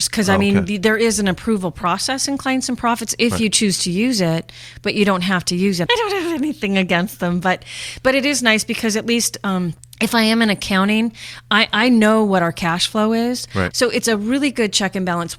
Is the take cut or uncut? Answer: cut